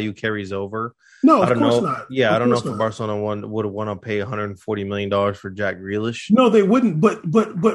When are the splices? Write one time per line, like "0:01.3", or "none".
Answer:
none